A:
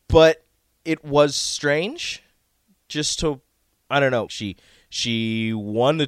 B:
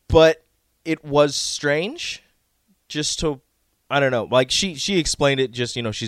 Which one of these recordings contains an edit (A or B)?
A